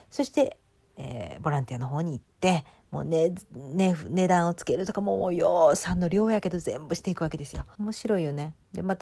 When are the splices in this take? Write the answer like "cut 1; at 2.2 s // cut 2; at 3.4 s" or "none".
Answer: cut 1; at 7.7 s